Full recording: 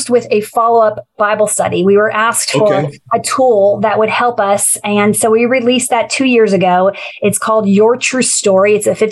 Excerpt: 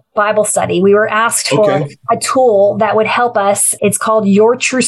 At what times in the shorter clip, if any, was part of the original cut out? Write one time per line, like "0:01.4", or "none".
0:03.8

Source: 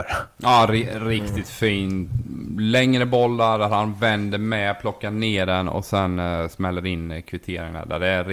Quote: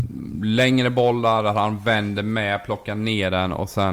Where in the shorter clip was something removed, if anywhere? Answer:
none

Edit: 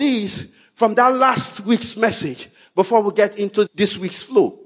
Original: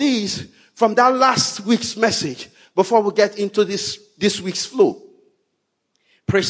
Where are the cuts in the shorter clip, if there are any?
0:03.7

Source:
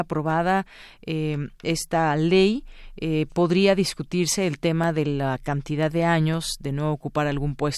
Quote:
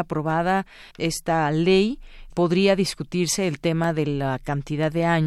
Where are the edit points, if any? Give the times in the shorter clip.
0:00.9
0:02.3

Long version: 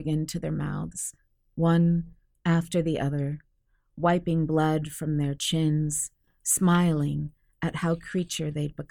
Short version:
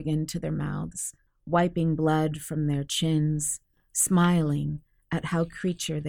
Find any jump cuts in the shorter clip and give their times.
0:01.3

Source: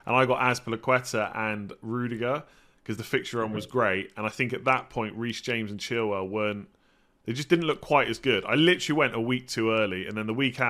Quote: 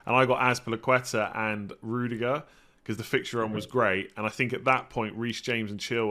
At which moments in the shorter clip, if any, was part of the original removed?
none

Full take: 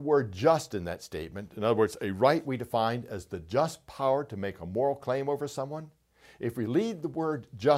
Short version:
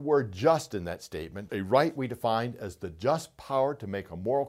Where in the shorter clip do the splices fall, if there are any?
0:01.5

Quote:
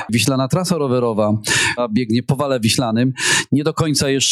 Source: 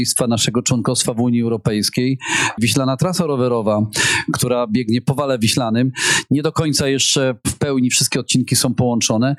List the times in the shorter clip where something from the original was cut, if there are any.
0:01.8

